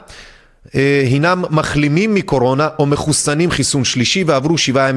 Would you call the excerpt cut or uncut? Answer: uncut